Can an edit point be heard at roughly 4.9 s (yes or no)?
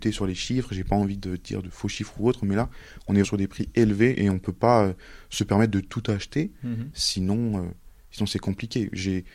no